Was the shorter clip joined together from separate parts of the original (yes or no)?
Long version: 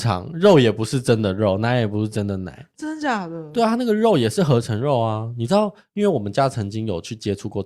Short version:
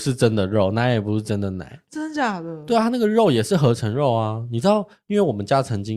no